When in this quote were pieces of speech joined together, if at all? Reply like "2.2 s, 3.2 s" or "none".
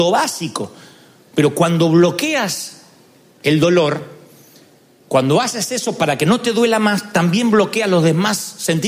none